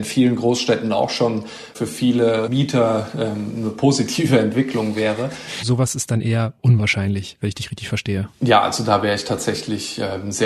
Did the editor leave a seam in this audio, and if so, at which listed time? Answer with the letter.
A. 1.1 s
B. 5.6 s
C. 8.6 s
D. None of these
B